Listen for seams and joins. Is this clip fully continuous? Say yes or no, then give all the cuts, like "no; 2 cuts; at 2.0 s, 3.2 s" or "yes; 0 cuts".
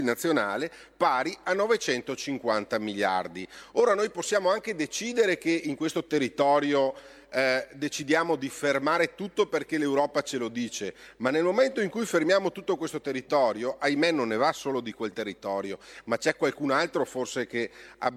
yes; 0 cuts